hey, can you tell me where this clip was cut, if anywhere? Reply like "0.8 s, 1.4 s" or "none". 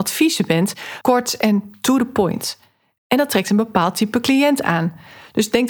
1.0 s